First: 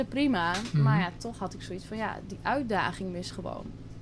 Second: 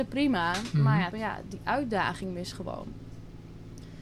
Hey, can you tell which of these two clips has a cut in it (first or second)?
second